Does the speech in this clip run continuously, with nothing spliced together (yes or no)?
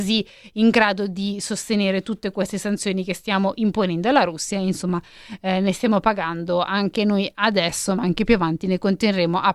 yes